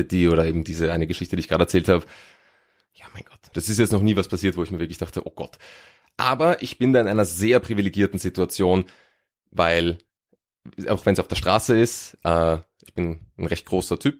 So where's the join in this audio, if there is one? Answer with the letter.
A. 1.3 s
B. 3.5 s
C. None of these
B